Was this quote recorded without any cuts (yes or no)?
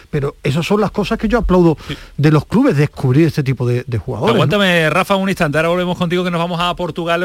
yes